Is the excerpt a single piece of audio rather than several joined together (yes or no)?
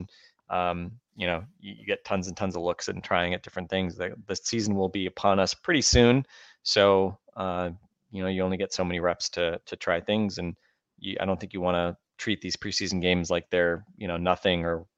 yes